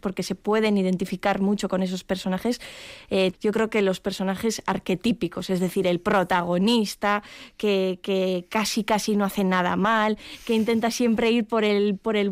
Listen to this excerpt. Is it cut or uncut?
cut